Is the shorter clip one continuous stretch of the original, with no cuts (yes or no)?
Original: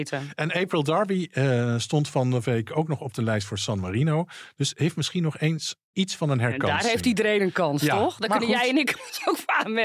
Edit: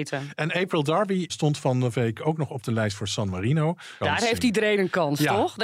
no